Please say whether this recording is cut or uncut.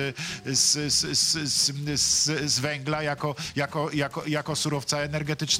uncut